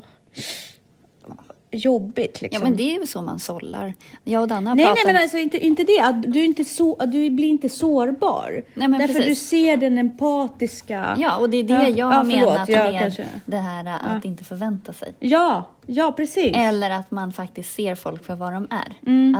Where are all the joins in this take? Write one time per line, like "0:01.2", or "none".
0:06.2